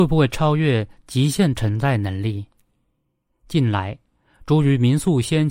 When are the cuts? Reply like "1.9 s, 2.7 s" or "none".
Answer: none